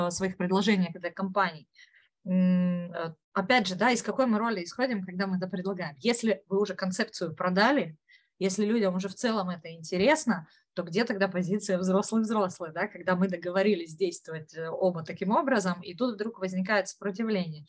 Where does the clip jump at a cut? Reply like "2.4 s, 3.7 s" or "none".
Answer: 3.2 s

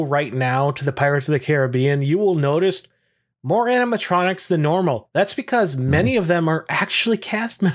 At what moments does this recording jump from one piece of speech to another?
none

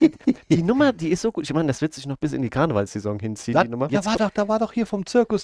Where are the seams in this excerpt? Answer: 3.9 s

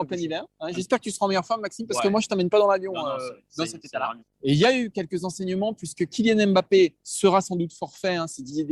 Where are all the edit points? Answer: 4.2 s, 7.0 s

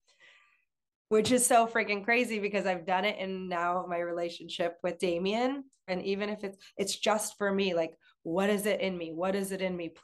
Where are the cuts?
5.9 s

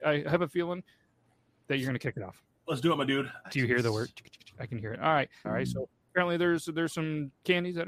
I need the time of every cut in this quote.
3.4 s, 5.4 s

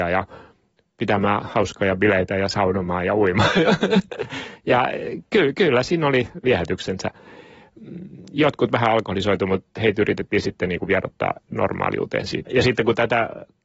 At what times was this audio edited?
12.5 s

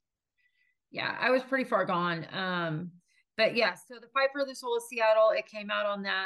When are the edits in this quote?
none

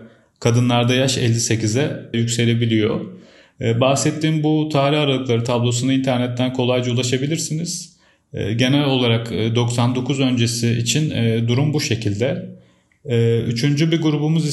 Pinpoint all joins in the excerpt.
2.1 s

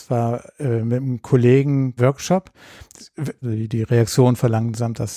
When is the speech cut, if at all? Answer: 2.0 s, 3.4 s

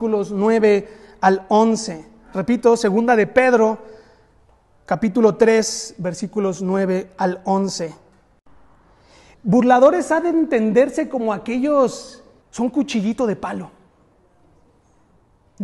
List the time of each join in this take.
9.3 s, 12.4 s

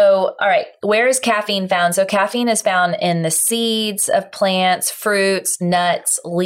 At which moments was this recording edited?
none

